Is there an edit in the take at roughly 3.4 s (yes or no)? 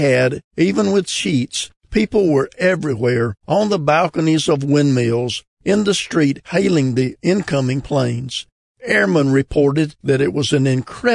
yes